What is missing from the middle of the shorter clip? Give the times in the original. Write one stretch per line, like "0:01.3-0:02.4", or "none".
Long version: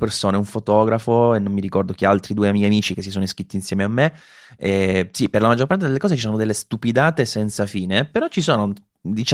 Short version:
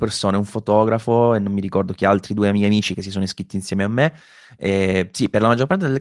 none